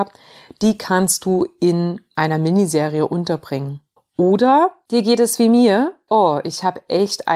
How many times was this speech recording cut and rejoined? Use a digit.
2